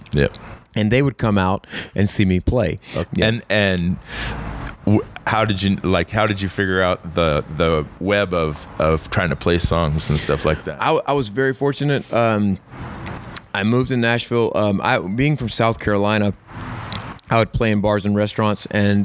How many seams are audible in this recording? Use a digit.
1